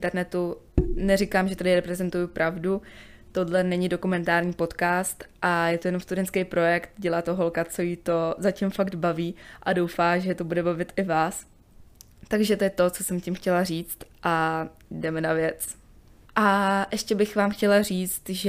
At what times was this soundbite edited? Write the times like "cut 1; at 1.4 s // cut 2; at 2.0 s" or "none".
cut 1; at 16.2 s